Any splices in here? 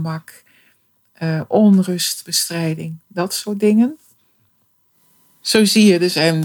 no; 0 cuts

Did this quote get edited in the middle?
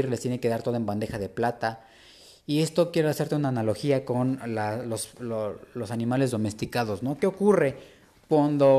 no; 0 cuts

